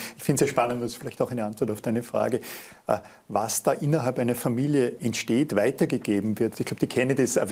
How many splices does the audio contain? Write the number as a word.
one